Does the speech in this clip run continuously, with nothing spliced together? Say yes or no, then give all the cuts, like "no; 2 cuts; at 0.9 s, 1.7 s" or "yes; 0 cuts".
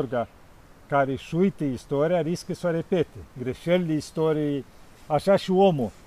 yes; 0 cuts